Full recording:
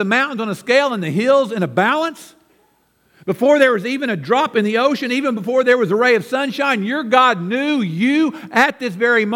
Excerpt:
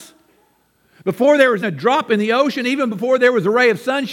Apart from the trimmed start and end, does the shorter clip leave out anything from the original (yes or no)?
yes